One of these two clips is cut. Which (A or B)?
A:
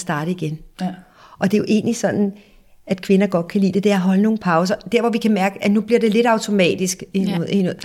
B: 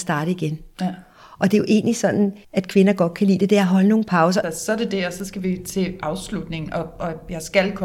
B